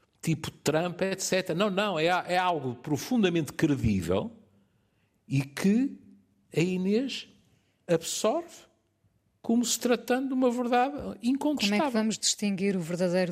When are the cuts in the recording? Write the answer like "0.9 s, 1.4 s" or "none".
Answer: none